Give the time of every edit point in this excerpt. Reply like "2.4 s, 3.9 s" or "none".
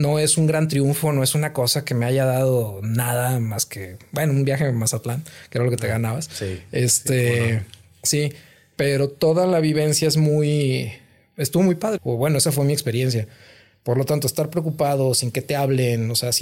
12.0 s